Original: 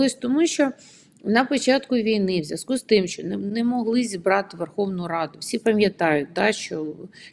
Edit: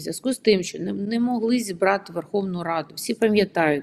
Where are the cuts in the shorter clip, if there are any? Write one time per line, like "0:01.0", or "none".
none